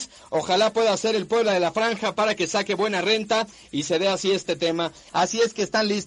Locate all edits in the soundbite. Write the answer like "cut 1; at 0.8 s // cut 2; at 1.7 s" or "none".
cut 1; at 5.1 s